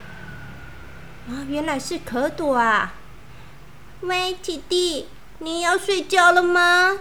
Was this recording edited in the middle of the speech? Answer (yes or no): no